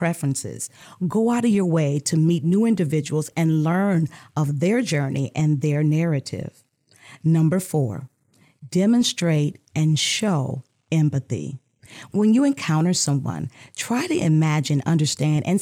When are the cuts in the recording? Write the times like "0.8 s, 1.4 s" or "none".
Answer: none